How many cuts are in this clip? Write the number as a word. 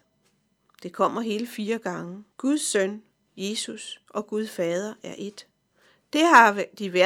one